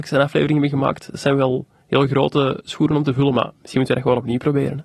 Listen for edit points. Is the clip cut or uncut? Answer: uncut